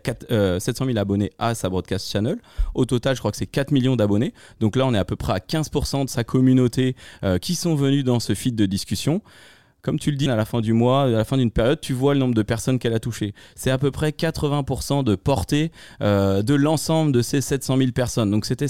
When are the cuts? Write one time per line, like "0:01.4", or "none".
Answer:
0:10.3